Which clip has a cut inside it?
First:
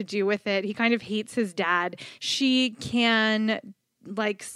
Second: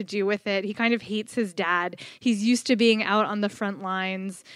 first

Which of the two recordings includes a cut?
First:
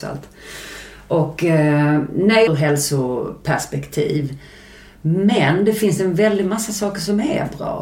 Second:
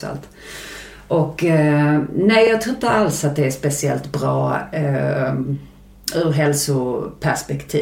first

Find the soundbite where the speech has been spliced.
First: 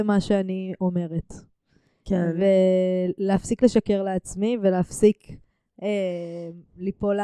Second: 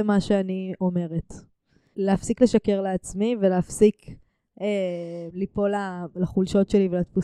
second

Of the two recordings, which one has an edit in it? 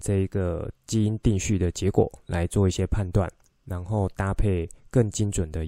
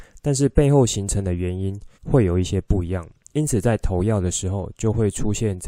second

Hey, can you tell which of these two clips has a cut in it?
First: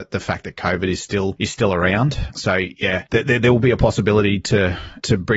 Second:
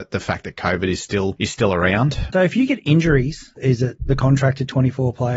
second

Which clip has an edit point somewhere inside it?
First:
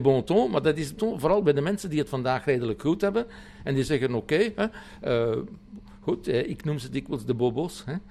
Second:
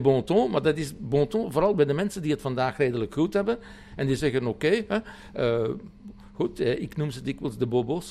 first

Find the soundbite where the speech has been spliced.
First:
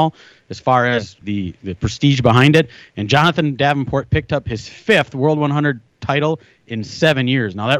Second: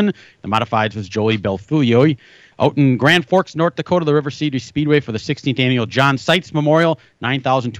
first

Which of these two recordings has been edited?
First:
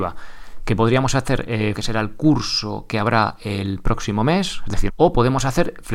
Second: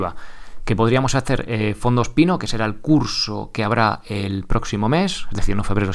first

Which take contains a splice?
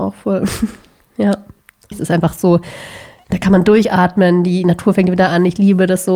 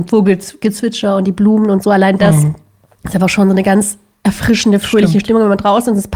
first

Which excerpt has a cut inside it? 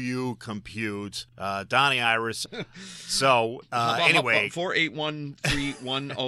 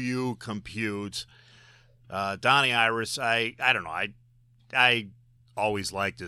first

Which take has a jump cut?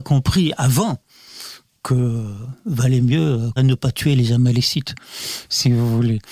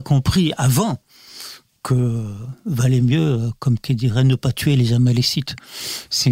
first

